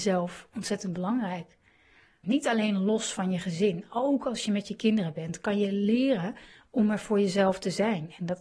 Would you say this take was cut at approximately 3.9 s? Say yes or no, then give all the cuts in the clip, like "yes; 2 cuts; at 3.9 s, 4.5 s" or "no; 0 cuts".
no; 1 cut; at 2.2 s